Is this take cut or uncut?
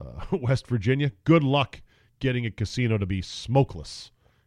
uncut